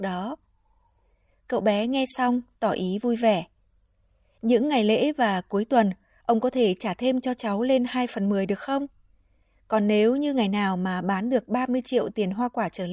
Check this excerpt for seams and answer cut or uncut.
uncut